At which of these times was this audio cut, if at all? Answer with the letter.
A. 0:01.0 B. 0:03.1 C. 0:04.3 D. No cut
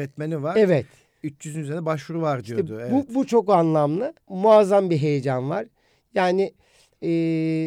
C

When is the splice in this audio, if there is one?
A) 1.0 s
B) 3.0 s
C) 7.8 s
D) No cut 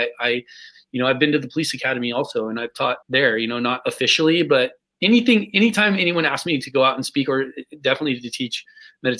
B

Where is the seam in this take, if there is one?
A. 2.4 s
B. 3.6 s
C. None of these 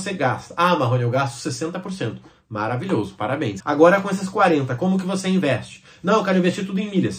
B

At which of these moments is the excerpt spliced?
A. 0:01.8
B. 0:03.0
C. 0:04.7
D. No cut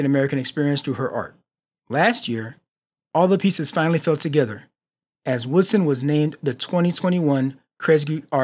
D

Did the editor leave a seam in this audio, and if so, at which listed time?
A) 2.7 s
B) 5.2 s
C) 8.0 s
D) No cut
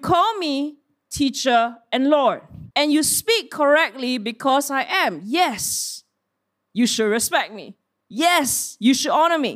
A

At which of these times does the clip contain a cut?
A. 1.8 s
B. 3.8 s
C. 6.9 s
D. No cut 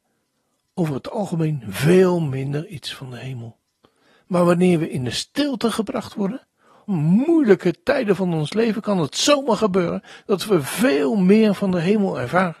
C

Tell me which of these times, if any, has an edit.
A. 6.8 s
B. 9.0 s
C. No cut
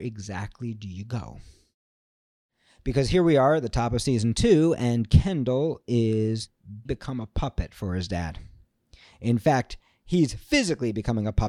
A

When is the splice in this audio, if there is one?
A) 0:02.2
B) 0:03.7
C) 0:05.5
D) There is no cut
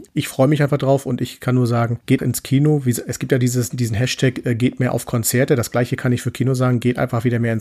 A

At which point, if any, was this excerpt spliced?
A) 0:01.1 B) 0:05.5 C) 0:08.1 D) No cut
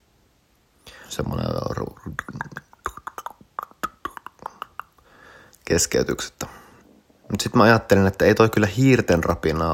A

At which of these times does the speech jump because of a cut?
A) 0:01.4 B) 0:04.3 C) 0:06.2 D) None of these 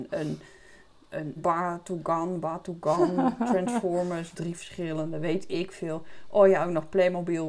A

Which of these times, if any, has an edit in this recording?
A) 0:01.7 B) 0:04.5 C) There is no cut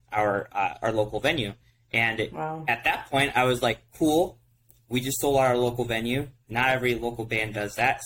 C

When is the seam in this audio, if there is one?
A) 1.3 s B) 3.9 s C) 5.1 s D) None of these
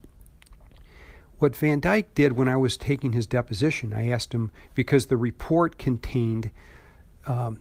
D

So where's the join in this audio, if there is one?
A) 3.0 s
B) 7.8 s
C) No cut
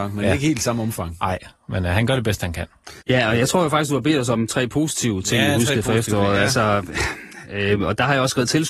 A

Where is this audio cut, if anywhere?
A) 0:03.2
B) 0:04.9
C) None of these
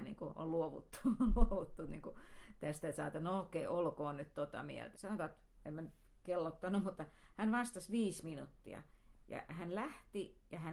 B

